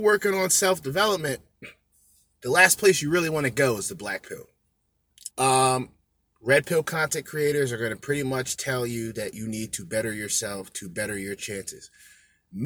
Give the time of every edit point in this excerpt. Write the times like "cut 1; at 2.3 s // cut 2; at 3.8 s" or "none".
cut 1; at 5.3 s